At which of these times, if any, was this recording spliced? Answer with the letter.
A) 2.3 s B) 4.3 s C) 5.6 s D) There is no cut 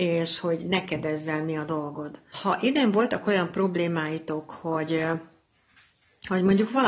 A